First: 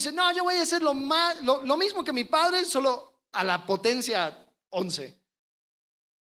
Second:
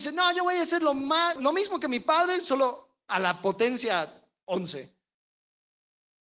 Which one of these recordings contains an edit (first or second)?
second